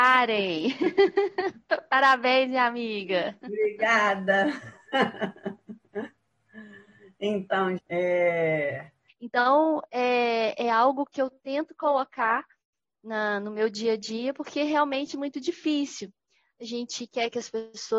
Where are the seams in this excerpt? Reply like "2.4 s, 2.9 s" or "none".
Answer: 7.8 s, 9.1 s